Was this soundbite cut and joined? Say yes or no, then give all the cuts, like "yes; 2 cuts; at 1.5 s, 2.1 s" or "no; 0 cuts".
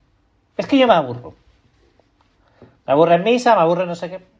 no; 0 cuts